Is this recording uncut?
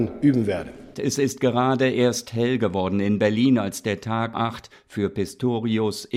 no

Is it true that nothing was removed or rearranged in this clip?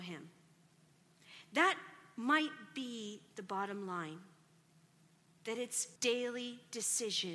no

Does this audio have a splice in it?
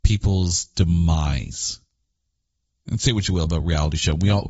yes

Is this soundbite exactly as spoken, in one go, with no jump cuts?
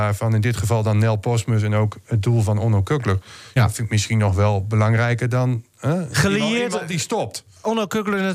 yes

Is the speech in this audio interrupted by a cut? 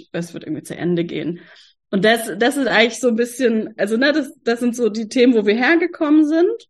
no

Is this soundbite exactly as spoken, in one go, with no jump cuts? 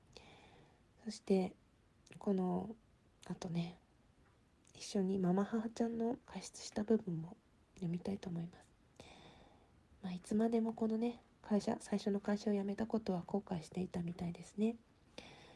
no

